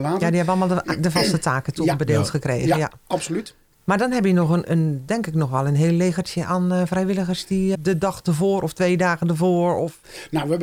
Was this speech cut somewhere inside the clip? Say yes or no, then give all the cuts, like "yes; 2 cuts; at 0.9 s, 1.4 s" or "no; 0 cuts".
yes; 2 cuts; at 4.6 s, 7.7 s